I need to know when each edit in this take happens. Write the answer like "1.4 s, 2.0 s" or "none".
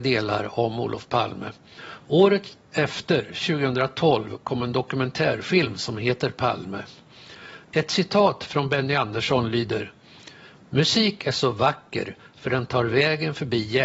7.6 s

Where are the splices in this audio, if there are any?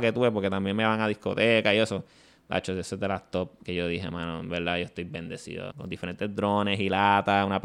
5.7 s

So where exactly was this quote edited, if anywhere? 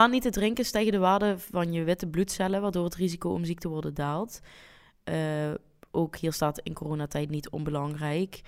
none

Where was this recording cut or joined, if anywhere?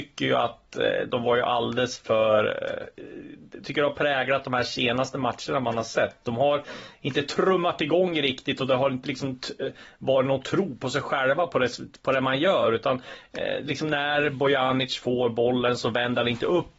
3.6 s, 9.0 s

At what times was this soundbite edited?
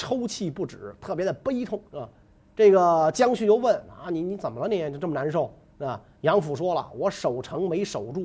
1.9 s

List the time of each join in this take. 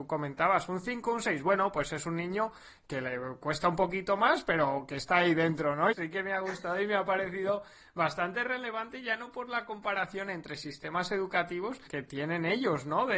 5.9 s, 11.9 s

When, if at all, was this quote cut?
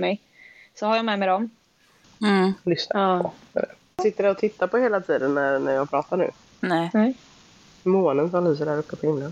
2.0 s

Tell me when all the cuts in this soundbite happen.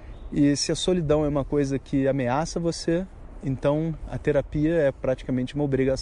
none

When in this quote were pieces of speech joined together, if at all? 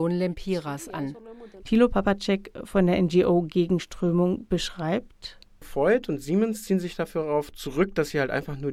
1.6 s

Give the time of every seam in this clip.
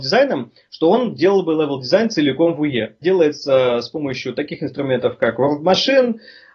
3.0 s

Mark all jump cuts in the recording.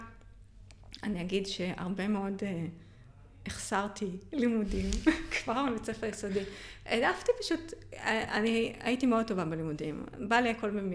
none

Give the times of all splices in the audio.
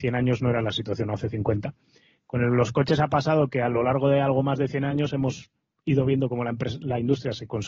none

